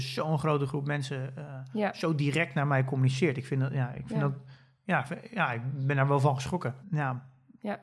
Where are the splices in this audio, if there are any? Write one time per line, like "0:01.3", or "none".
0:06.8